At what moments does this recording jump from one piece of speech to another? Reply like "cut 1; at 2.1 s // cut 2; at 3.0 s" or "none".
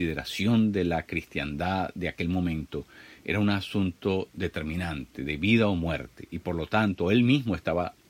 none